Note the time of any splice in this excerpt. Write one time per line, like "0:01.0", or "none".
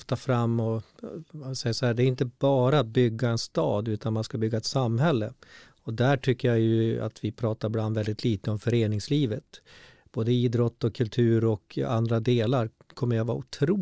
none